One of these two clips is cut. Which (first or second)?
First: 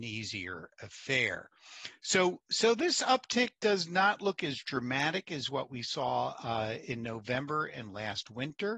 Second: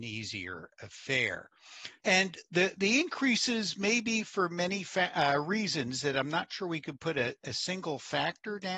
second